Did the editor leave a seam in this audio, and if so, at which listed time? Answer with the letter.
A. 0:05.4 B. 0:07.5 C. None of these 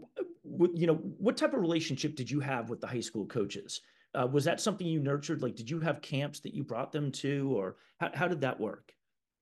C